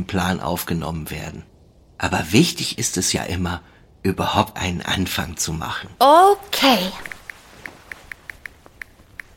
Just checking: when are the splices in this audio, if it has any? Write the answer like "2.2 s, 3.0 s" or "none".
6.0 s